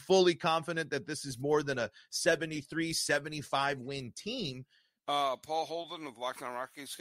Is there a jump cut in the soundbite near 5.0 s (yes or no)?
yes